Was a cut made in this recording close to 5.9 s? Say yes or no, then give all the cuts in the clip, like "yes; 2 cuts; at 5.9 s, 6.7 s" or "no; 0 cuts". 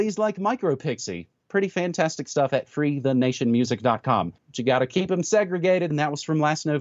yes; 2 cuts; at 4.4 s, 5.9 s